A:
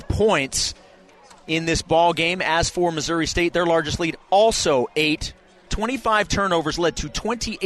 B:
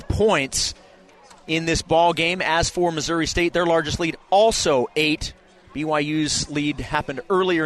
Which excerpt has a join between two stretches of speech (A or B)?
A